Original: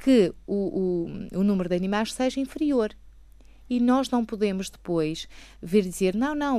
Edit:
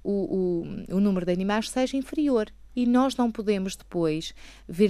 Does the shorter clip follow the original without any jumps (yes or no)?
no